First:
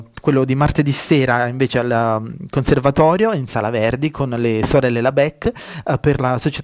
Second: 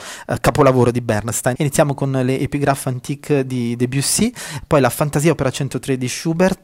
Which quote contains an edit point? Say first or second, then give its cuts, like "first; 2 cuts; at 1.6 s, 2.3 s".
second; 1 cut; at 1.6 s